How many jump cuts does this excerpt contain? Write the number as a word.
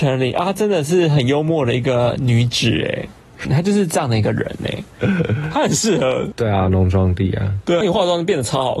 three